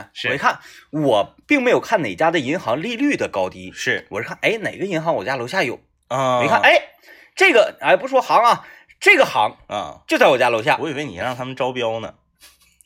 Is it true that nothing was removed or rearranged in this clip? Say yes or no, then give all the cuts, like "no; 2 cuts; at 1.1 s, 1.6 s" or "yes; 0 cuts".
no; 1 cut; at 1.4 s